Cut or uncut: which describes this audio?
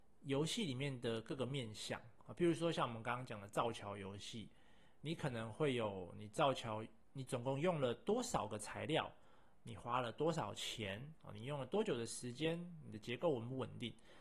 uncut